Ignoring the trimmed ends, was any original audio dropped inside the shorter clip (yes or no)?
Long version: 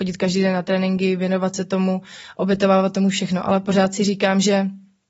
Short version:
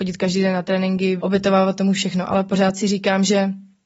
yes